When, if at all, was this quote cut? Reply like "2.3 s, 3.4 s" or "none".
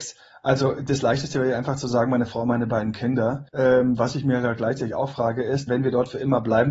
3.5 s, 5.7 s